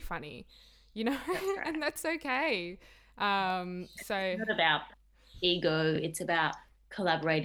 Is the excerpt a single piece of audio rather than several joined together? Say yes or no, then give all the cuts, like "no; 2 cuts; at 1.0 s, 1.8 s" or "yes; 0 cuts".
yes; 0 cuts